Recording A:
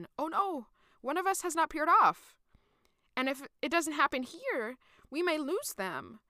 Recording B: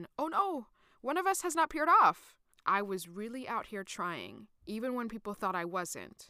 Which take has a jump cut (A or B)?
B